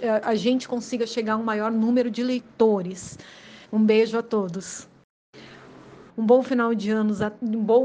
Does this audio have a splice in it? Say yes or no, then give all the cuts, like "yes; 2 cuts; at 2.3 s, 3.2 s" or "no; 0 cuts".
yes; 2 cuts; at 3.7 s, 6.1 s